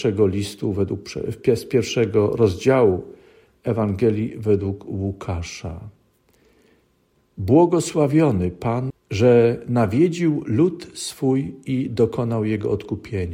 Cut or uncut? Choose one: cut